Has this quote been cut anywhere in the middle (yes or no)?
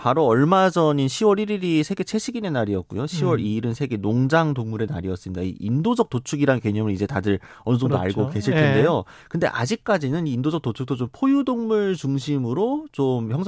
no